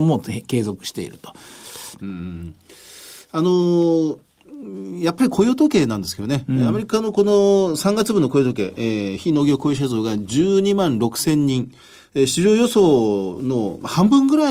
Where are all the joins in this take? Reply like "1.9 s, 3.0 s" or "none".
2.0 s